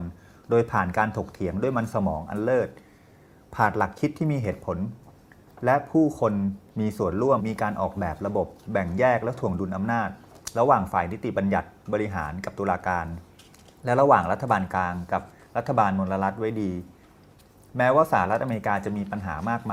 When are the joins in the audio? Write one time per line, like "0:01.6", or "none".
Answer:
0:07.4